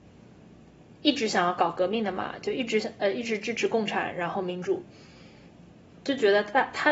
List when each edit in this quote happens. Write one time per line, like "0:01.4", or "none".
0:05.9